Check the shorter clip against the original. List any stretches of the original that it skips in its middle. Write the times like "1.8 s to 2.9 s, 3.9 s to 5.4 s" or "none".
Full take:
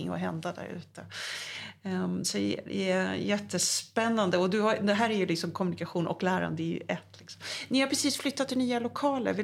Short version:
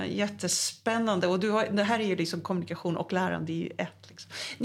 none